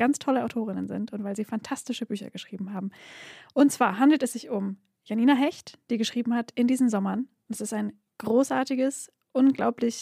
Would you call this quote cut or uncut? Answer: uncut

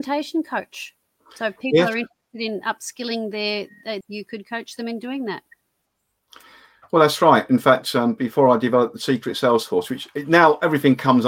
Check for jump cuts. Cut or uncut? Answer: cut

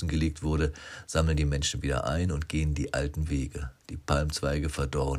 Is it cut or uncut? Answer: cut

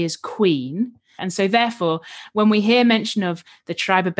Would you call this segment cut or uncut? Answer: cut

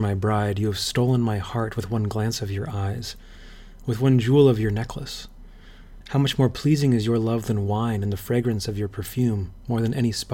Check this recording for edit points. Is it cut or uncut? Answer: cut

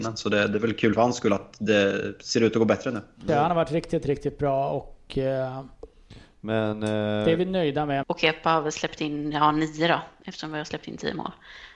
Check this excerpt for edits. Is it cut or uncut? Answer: cut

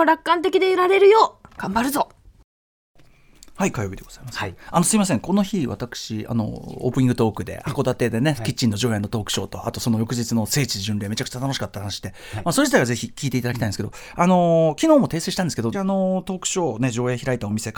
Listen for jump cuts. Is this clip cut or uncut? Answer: cut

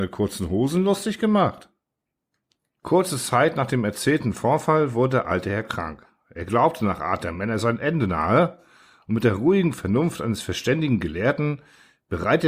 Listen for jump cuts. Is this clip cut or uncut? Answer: uncut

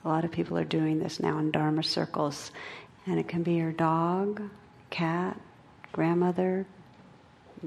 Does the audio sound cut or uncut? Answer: cut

